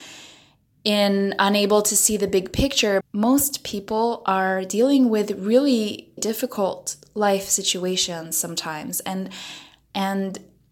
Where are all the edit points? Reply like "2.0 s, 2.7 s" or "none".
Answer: 3.0 s, 6.2 s